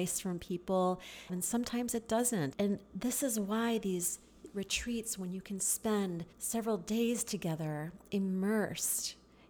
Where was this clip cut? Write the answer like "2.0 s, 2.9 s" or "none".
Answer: 1.3 s, 2.5 s, 6.3 s